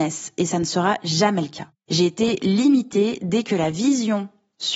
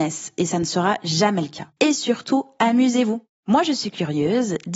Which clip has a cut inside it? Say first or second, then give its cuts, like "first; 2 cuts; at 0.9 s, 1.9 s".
second; 1 cut; at 1.8 s